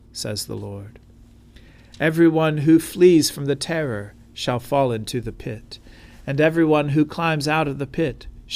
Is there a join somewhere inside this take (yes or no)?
no